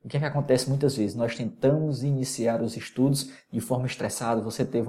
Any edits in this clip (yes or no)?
no